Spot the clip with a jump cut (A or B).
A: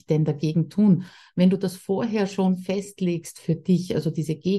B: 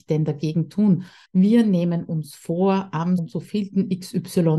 B